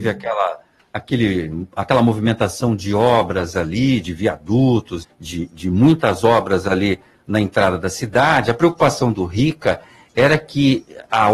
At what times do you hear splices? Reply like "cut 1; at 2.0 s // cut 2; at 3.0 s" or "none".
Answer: cut 1; at 5.0 s